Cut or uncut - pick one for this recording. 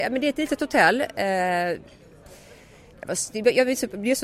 uncut